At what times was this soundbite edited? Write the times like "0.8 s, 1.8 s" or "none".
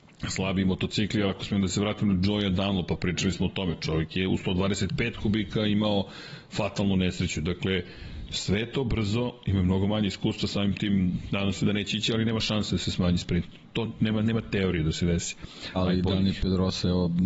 15.8 s